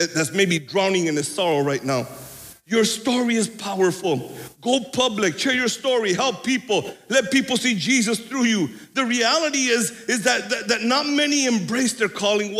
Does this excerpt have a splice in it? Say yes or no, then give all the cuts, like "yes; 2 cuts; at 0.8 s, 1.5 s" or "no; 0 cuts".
no; 0 cuts